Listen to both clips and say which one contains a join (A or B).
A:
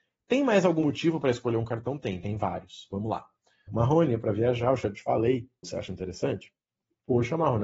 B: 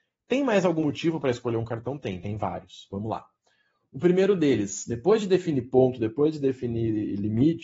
A